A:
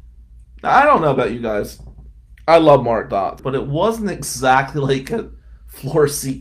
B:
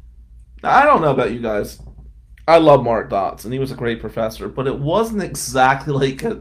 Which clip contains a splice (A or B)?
A